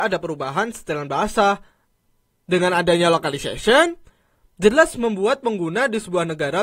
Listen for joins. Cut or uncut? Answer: uncut